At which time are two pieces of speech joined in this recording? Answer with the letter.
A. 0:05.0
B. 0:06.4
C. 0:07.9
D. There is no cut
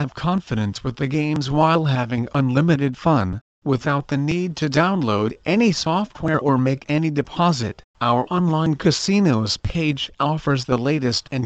C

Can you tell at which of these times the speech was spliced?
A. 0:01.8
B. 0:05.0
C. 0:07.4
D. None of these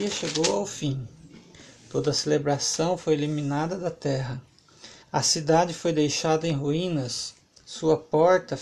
B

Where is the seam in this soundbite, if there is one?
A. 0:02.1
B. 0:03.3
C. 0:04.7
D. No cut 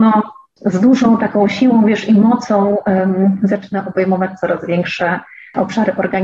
D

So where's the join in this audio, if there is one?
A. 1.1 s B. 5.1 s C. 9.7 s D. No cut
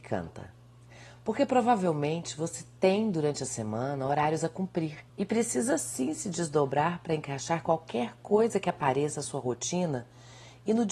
B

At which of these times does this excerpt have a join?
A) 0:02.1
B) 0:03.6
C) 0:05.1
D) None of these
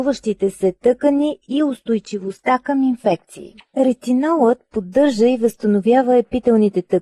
B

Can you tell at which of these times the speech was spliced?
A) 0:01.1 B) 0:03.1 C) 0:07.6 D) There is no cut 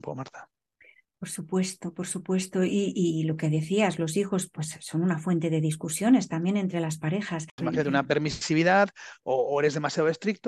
C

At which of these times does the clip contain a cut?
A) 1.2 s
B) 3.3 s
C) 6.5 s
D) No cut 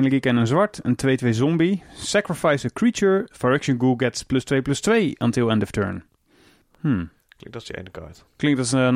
B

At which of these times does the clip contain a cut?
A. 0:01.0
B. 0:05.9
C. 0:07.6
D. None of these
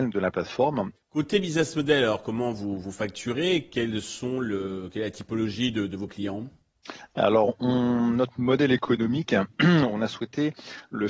A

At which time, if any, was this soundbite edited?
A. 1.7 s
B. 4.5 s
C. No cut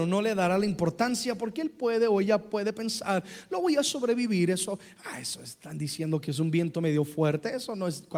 C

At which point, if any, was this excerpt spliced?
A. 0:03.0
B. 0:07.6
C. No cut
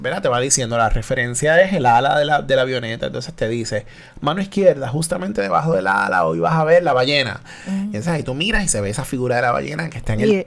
C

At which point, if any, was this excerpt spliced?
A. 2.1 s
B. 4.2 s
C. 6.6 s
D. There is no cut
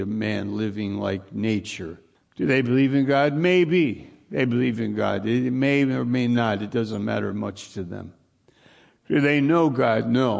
A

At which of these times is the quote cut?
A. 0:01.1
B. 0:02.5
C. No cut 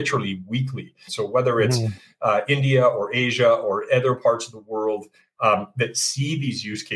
A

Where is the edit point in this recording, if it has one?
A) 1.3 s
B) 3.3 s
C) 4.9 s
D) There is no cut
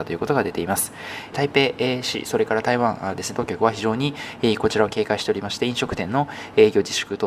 A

